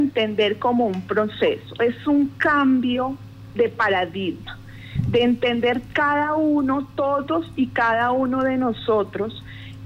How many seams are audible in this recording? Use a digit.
0